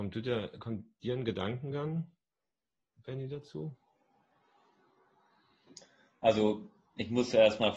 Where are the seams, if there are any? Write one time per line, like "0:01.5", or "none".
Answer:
none